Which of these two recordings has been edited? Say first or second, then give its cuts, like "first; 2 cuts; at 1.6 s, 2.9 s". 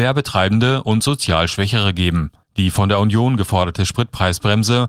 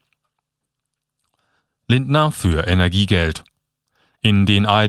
first; 1 cut; at 2.4 s